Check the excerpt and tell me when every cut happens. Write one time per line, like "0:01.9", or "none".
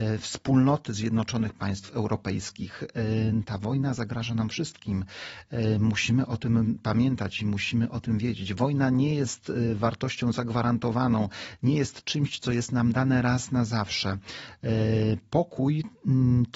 none